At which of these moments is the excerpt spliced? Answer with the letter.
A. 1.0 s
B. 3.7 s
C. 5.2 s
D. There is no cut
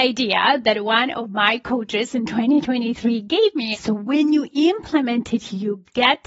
B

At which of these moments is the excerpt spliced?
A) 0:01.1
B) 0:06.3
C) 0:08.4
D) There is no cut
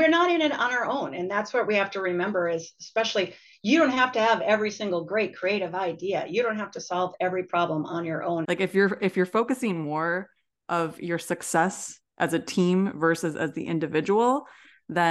C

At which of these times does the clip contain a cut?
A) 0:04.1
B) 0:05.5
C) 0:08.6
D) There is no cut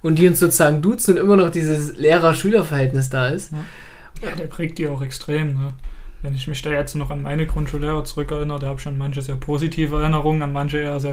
A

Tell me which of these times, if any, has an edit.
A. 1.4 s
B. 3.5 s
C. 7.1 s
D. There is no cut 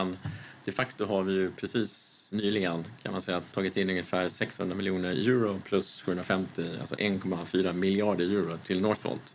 B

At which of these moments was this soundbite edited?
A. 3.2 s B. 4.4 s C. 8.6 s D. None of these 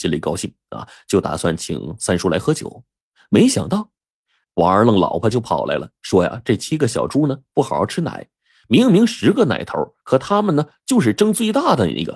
B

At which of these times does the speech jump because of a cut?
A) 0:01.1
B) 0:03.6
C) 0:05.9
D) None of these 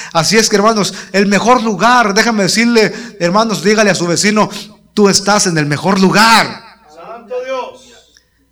D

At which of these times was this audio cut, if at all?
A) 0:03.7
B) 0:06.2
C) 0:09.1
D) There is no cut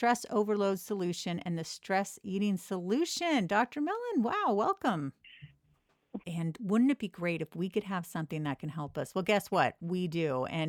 B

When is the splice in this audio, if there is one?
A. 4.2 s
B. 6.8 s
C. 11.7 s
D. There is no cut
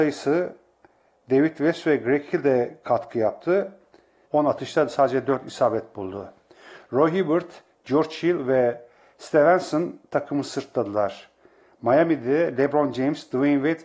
A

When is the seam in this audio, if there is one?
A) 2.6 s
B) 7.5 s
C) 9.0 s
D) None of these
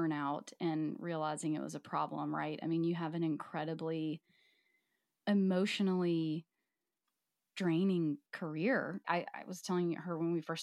C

